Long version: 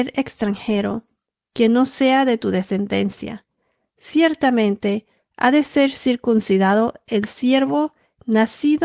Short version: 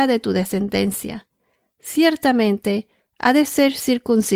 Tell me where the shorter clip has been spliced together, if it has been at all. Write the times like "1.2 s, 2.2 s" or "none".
none